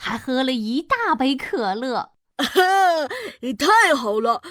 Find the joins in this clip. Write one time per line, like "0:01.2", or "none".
0:02.2